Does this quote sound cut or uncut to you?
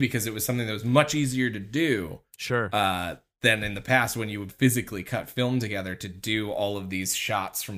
uncut